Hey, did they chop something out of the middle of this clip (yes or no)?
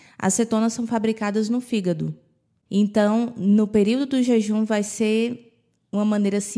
yes